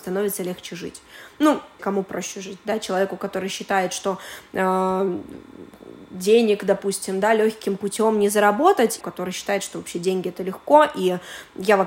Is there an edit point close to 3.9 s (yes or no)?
no